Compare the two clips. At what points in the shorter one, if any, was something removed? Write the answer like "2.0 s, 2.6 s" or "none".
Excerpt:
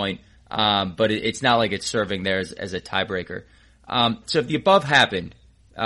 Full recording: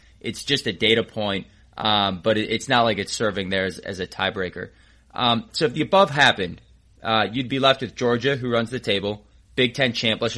none